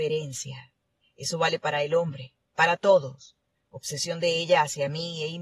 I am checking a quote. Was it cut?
yes; 2 cuts; at 1.0 s, 3.5 s

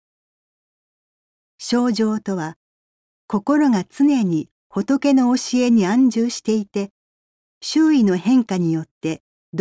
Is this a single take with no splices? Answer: yes; 0 cuts

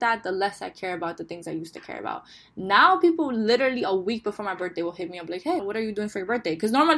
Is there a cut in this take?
yes; 1 cut; at 5.6 s

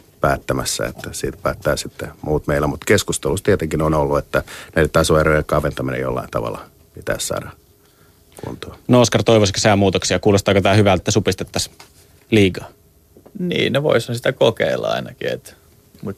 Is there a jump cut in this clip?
yes; 1 cut; at 11.0 s

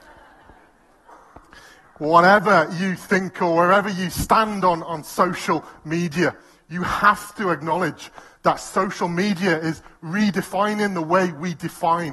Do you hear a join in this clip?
no; 0 cuts

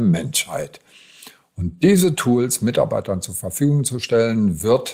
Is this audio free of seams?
yes; 0 cuts

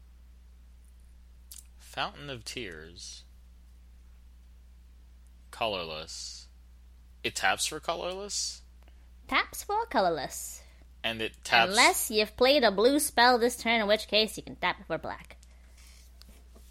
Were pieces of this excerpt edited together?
no; 0 cuts

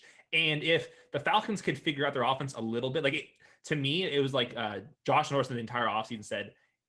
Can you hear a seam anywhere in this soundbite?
yes; 1 cut; at 4.9 s

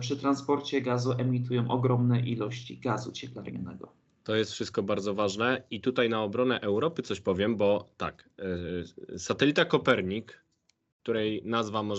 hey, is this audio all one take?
yes; 0 cuts

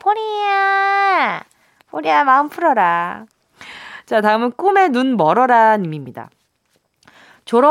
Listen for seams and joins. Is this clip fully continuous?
no; 1 cut; at 1.8 s

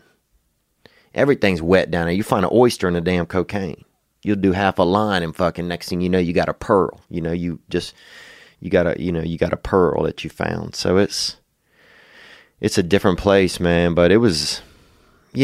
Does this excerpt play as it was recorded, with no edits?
yes; 0 cuts

